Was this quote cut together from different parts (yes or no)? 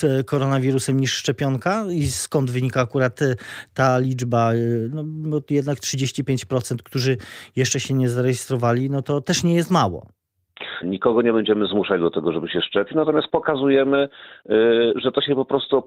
yes